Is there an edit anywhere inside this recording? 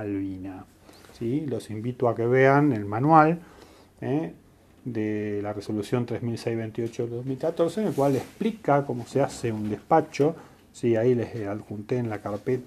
no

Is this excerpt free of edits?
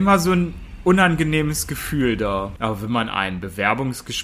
no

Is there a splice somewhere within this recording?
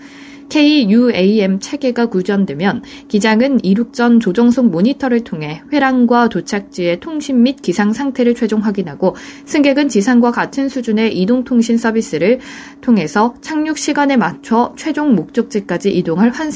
no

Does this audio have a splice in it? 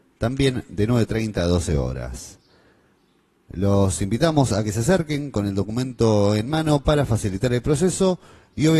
no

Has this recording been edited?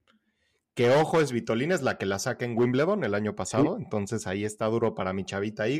no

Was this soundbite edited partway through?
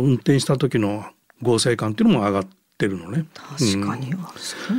no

